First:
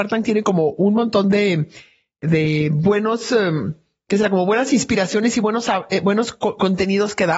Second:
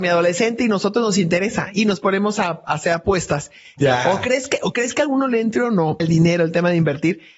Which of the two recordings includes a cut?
second; 2 cuts; at 3.8 s, 6.0 s

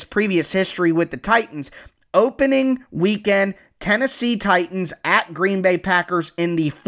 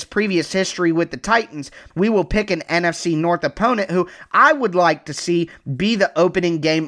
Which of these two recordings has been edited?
second; 1 cut; at 1.9 s

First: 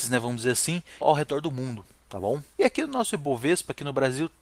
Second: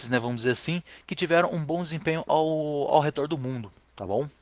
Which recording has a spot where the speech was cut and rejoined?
first; 2 cuts; at 1.0 s, 2.5 s

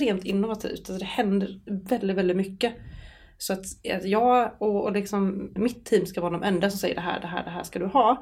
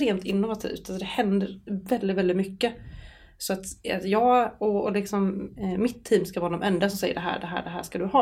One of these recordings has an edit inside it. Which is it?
first; 1 cut; at 5.6 s

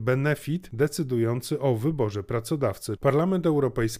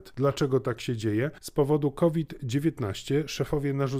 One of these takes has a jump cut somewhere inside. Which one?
first; 1 cut; at 3.0 s

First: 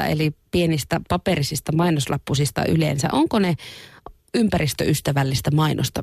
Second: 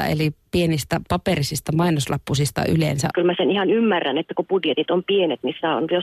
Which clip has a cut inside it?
second; 1 cut; at 3.1 s

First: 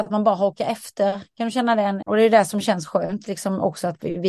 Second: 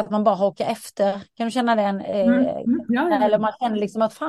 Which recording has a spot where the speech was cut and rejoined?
first; 1 cut; at 2.0 s

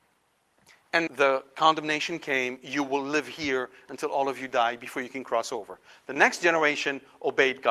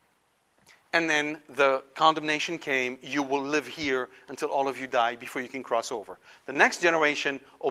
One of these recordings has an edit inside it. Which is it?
first; 1 cut; at 1.1 s

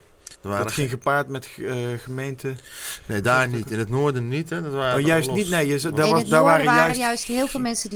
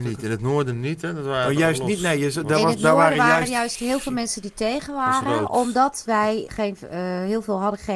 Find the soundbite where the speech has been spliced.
second; 1 cut; at 6.5 s

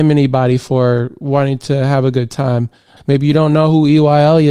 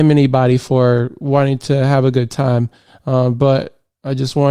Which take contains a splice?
first; 1 cut; at 3.0 s

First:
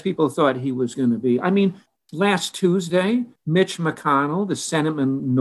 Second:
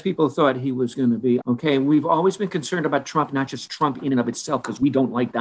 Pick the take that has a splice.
second; 1 cut; at 1.4 s

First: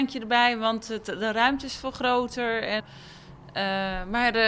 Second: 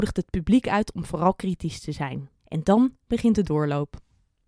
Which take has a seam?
first; 1 cut; at 2.8 s

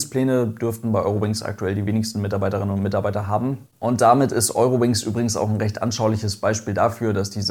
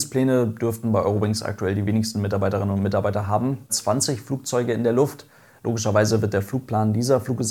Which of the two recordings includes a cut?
second; 1 cut; at 3.7 s

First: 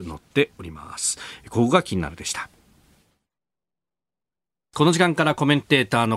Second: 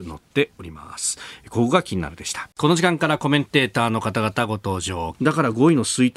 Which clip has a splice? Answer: second; 2 cuts; at 2.5 s, 5.1 s

